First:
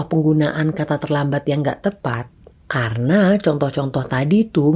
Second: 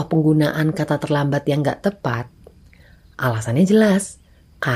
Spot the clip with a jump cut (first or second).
first